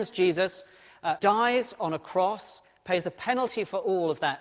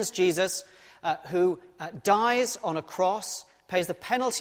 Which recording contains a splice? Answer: first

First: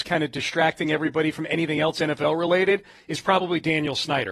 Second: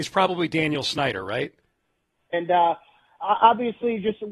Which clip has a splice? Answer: second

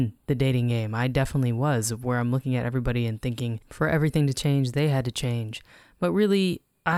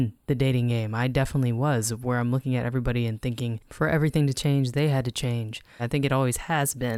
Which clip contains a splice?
second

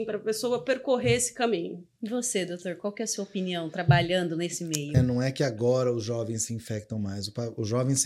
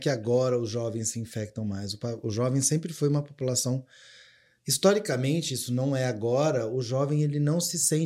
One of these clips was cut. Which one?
first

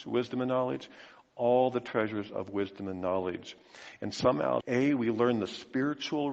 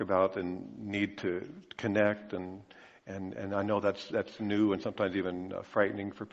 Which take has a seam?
first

